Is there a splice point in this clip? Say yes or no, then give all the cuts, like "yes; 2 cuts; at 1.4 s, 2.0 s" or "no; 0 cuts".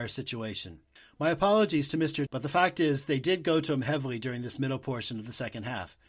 yes; 1 cut; at 2.3 s